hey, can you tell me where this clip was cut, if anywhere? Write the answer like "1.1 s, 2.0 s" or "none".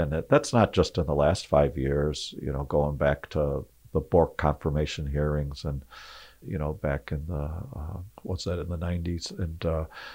6.4 s, 8.2 s